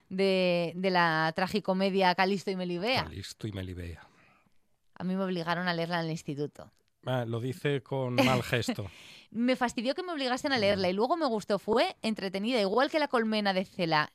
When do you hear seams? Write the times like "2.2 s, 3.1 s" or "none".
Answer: none